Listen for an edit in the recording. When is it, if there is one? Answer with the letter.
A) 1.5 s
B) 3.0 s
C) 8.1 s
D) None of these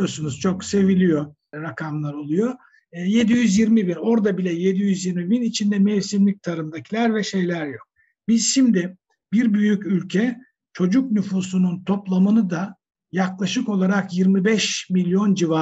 A